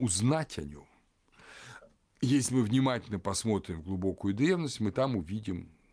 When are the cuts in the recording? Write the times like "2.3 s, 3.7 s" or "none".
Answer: none